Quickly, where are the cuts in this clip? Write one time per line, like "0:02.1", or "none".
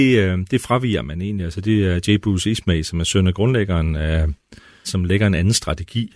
0:04.8